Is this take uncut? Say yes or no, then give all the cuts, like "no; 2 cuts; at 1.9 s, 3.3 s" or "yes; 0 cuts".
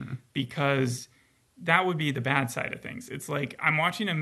yes; 0 cuts